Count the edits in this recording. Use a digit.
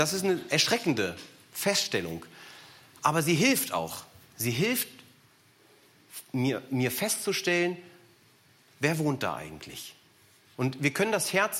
1